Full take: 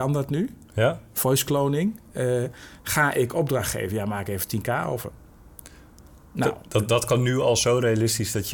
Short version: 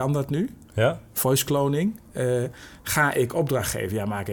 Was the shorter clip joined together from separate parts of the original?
no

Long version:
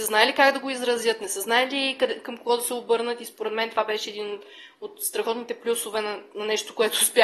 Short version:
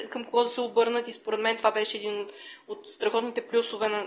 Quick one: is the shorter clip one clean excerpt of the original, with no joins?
yes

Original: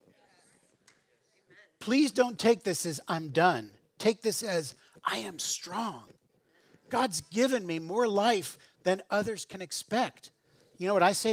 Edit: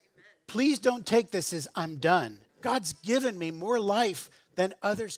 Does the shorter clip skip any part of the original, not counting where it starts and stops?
yes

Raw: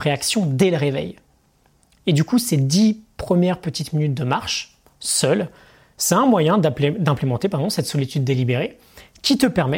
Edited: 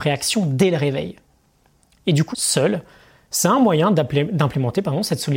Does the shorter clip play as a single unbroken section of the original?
no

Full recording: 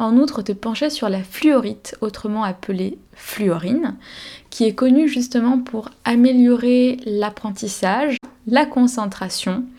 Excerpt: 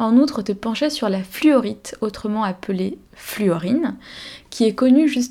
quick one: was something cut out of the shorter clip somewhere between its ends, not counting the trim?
no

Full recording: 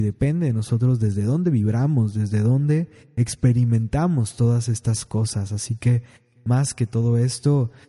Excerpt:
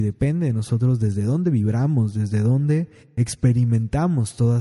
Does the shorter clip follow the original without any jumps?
yes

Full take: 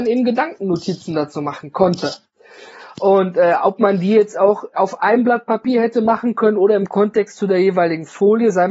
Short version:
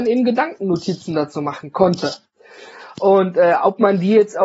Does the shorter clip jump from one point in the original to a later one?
no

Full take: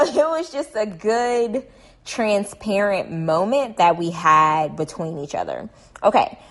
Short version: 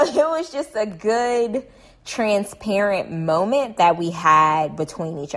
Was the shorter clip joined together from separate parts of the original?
no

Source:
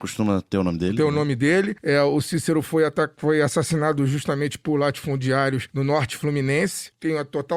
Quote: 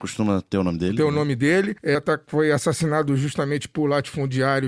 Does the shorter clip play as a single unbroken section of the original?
no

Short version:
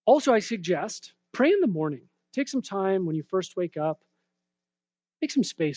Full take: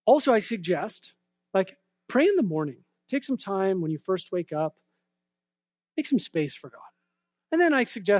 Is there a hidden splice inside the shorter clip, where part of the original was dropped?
yes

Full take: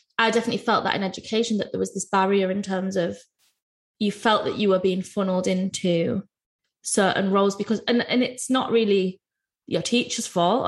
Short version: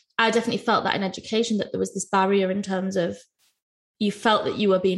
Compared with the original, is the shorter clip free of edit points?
yes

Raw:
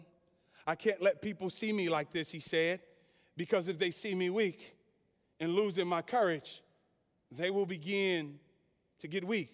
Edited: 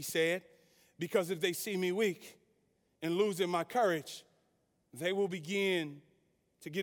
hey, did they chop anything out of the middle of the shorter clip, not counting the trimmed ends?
no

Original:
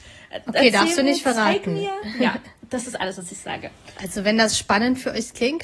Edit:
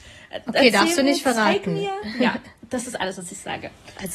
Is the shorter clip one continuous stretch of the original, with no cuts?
yes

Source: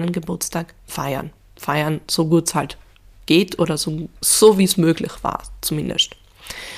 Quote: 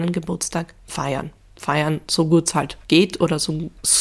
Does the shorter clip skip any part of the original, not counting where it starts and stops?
yes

